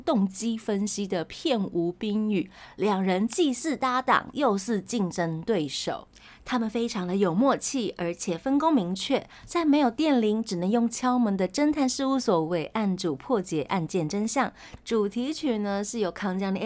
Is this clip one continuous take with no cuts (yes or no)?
no